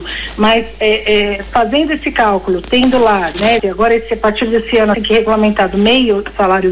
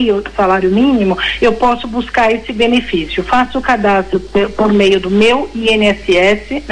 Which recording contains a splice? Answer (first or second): first